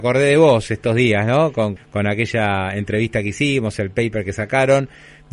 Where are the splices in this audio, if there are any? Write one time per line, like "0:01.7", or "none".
0:01.8